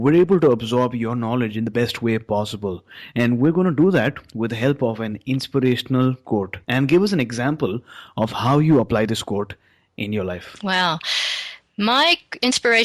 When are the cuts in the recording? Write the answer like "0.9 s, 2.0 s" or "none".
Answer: 6.6 s